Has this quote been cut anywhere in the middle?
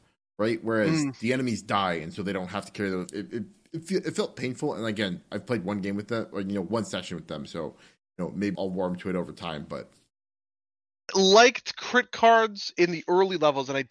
yes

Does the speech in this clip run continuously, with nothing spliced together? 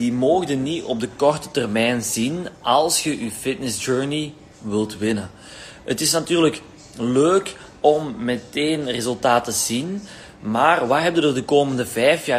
yes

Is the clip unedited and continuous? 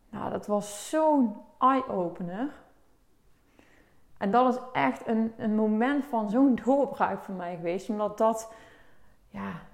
yes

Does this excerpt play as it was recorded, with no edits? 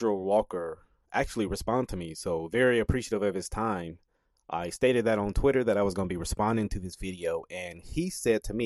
yes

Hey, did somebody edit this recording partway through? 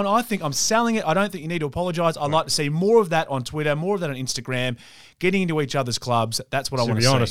no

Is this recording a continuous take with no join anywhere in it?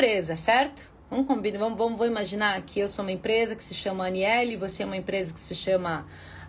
yes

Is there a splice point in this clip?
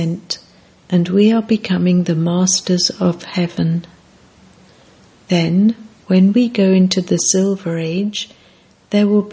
no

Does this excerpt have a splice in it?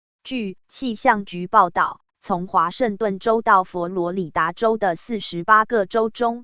yes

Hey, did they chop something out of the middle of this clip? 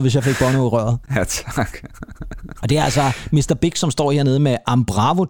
no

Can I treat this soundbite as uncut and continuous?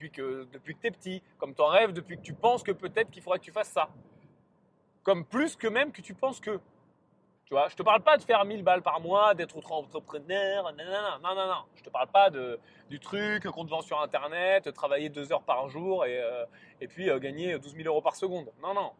no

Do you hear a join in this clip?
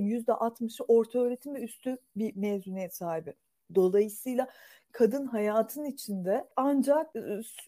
no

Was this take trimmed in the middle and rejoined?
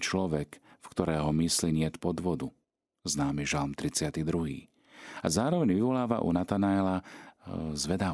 no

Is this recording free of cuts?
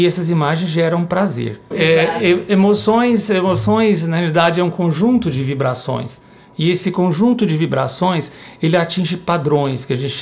no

